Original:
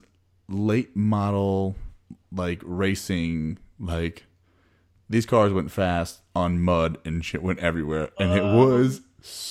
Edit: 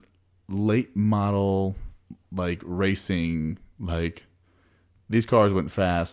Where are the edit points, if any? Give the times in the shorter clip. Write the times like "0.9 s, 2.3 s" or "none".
none